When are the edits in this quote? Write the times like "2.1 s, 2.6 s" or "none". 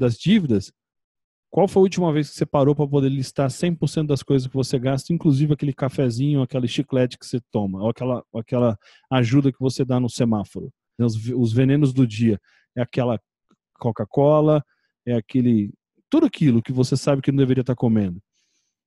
11.0 s